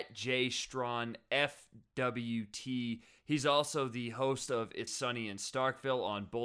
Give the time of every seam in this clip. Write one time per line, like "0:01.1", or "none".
0:03.2
0:04.9